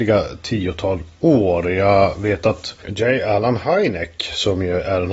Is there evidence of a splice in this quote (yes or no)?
no